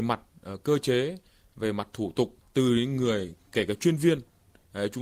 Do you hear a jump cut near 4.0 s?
no; 1 cut; at 2.4 s

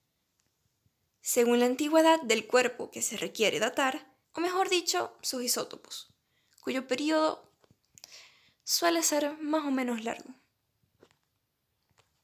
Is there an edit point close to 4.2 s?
yes; 1 cut; at 4.2 s

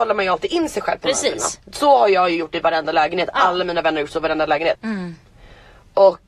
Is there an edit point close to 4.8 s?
yes; 1 cut; at 4.8 s

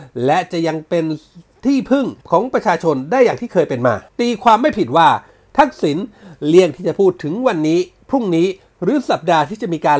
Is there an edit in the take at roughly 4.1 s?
yes; 2 cuts; at 2.2 s, 4.1 s

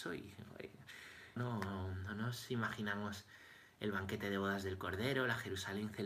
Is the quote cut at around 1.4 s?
yes; 1 cut; at 1.4 s

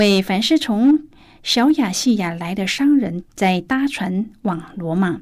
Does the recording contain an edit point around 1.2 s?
no; 1 cut; at 3.2 s

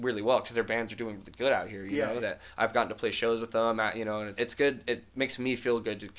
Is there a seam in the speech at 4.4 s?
yes; 2 cuts; at 2.2 s, 4.4 s

